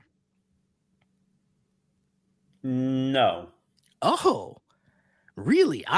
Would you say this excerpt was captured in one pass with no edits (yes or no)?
yes